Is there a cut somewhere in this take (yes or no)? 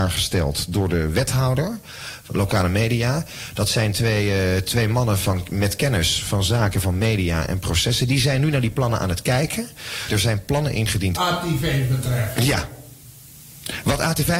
yes